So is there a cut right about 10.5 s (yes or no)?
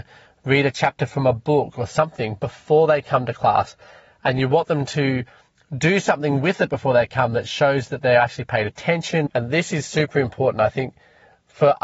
no